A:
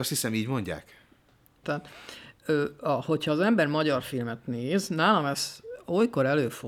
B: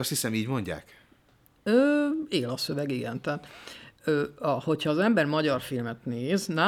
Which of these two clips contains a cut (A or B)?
A